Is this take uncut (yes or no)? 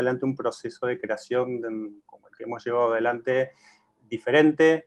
no